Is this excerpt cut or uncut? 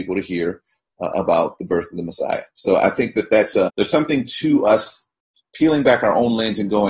cut